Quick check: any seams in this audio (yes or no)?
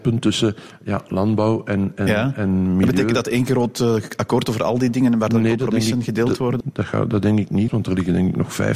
yes